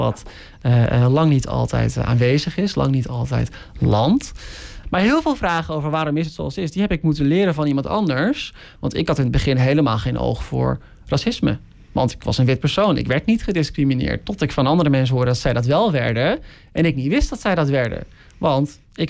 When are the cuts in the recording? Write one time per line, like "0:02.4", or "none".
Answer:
0:04.8